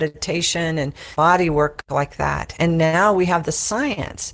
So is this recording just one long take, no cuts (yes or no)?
yes